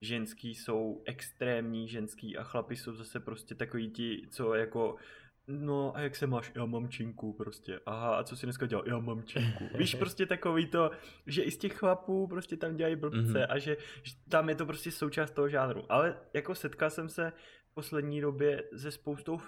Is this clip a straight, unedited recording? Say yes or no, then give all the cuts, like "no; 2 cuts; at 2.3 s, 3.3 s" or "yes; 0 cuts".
yes; 0 cuts